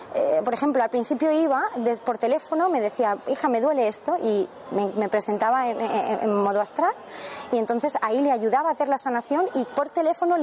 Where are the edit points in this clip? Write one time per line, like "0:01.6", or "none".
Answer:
none